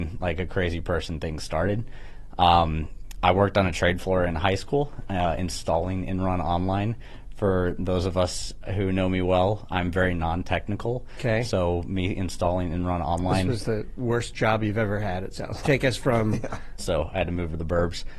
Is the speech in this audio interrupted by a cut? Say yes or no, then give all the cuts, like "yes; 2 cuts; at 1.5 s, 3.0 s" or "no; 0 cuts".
yes; 2 cuts; at 15.6 s, 16.8 s